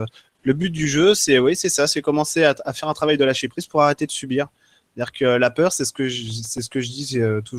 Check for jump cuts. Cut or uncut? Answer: uncut